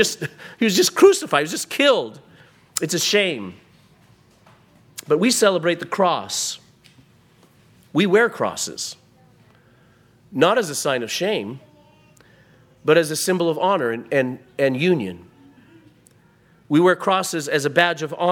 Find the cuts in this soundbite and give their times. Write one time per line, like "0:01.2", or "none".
none